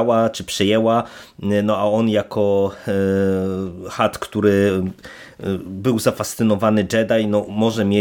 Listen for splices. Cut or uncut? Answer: uncut